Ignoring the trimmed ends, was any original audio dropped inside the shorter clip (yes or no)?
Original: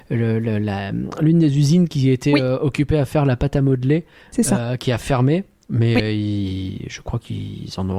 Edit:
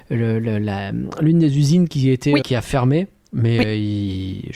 yes